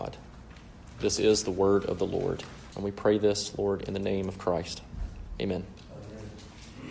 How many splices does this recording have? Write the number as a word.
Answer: one